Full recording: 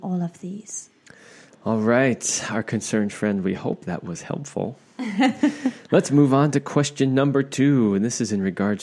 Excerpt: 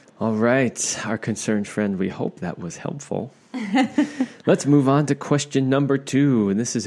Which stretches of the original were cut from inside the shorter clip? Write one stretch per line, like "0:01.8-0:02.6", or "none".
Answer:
none